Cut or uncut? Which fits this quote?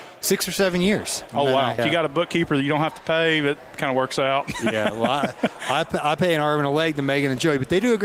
cut